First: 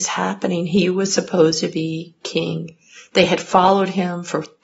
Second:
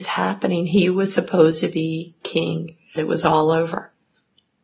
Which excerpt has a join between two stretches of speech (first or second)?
second